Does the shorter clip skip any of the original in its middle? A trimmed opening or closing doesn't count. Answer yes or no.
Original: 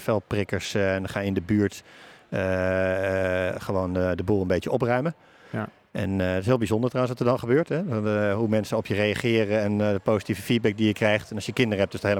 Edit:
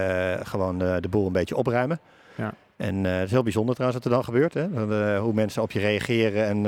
no